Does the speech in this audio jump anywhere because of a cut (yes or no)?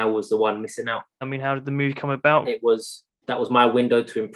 yes